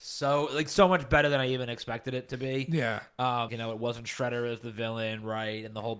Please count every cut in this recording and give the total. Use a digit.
1